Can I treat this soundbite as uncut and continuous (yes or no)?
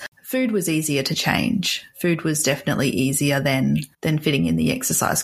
no